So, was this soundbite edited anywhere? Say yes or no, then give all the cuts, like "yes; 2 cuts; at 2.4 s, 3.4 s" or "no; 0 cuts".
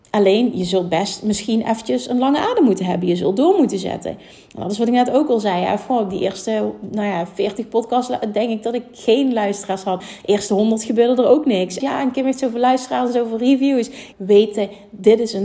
yes; 3 cuts; at 10.0 s, 11.8 s, 14.1 s